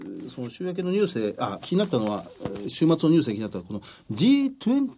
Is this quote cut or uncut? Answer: cut